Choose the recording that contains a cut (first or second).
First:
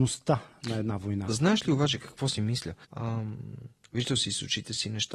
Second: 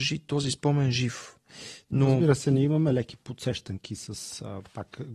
first